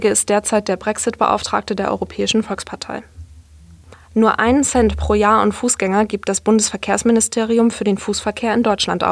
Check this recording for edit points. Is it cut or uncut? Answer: uncut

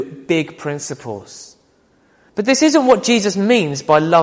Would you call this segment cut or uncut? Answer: cut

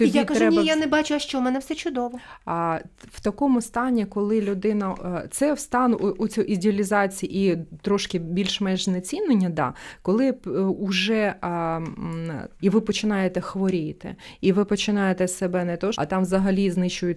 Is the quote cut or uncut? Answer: cut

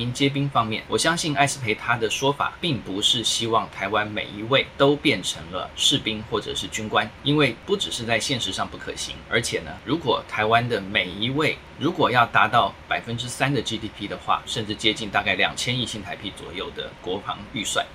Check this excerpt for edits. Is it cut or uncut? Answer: cut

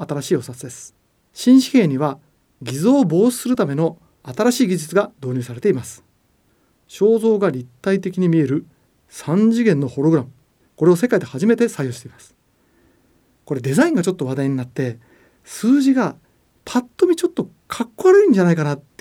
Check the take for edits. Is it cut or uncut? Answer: uncut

